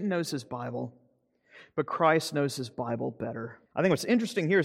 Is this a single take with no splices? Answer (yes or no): no